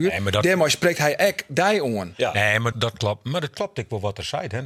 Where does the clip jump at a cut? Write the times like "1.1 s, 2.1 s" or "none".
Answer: 2.7 s